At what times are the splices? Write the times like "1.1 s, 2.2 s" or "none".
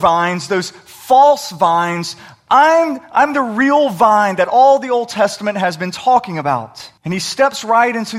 7.0 s